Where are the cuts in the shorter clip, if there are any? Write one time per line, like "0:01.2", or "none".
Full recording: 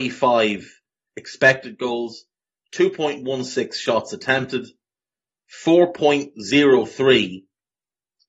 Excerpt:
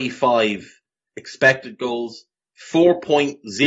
0:02.4